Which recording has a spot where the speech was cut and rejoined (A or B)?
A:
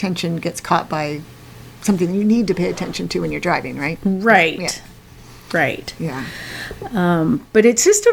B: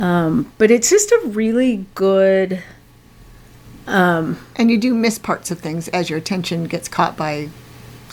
B